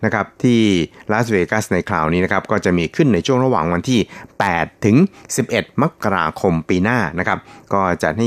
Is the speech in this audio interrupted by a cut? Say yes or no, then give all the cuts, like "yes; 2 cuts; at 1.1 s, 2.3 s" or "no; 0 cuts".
no; 0 cuts